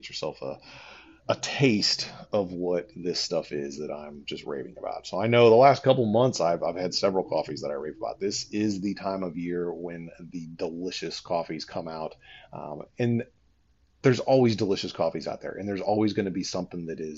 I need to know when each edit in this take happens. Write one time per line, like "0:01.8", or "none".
0:01.2